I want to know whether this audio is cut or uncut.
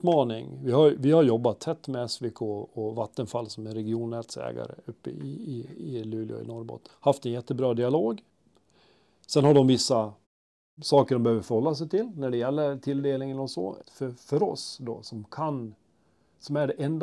cut